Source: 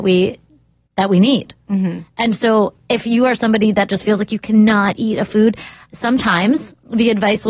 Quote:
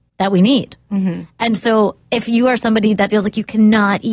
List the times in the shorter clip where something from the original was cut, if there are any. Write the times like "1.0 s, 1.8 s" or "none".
3.1 s